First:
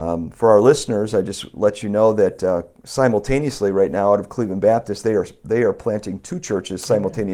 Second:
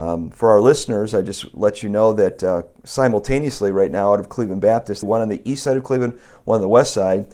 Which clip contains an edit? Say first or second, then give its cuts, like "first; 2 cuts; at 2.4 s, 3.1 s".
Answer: second; 1 cut; at 5.0 s